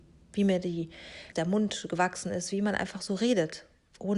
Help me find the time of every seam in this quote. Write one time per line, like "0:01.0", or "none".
0:01.3